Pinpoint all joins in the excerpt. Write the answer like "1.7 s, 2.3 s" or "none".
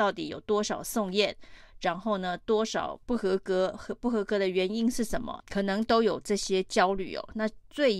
3.0 s, 5.4 s

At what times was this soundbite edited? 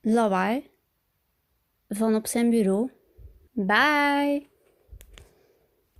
3.5 s

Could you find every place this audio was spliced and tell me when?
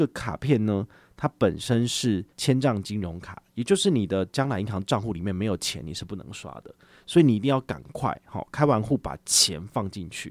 2.3 s

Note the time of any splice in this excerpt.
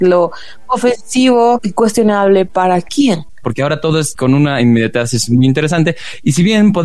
3.4 s

